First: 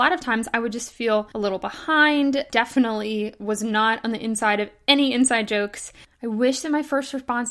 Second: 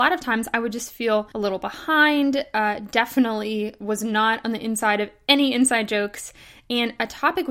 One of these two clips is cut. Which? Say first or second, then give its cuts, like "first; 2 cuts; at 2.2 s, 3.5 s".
first; 2 cuts; at 2.5 s, 6.0 s